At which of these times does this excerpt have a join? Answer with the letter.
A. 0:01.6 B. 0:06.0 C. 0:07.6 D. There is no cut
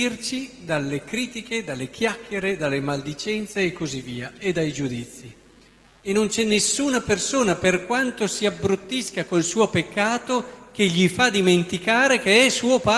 B